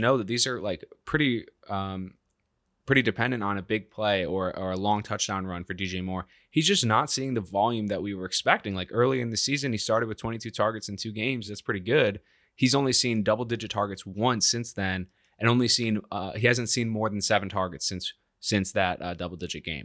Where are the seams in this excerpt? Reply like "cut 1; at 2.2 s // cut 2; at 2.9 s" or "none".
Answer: none

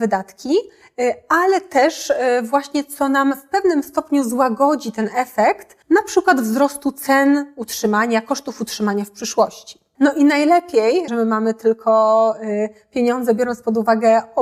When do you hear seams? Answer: cut 1; at 5.8 s // cut 2; at 9.9 s // cut 3; at 11.1 s

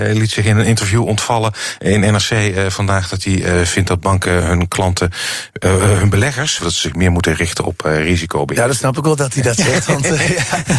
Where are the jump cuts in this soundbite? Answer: cut 1; at 6.6 s

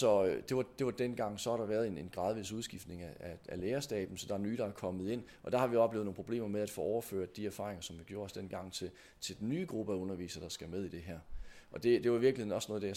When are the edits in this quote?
none

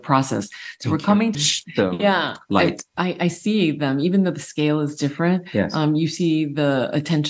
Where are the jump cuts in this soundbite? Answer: cut 1; at 1.3 s

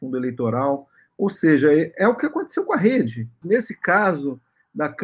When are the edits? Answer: cut 1; at 3.4 s

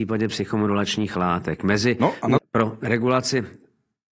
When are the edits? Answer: cut 1; at 2.4 s

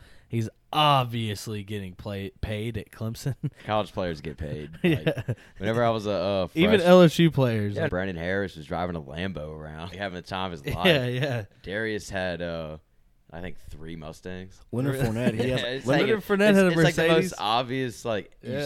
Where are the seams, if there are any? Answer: cut 1; at 7.9 s // cut 2; at 9.9 s

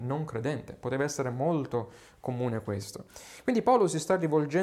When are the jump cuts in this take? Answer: none

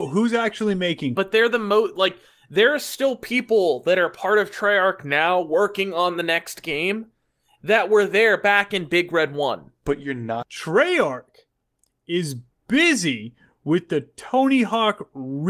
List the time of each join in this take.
cut 1; at 1.2 s // cut 2; at 10.4 s

